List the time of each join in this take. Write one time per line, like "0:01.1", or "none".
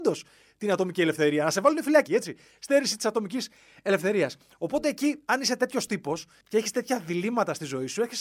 0:02.1